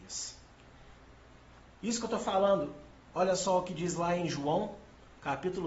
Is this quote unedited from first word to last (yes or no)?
yes